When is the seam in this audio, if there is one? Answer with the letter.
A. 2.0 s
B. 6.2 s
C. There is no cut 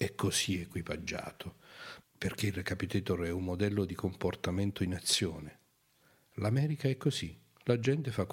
A